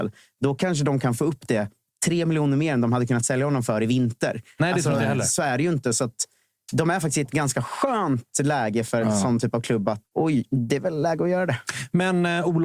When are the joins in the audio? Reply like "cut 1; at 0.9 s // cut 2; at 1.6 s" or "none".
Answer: cut 1; at 4.6 s // cut 2; at 10.0 s